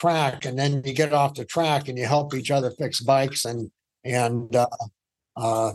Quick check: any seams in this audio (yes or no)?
no